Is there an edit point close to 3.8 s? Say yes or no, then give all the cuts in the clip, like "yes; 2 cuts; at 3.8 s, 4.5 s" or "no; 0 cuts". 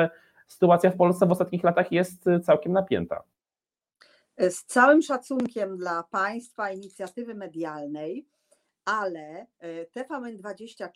no; 1 cut; at 9.5 s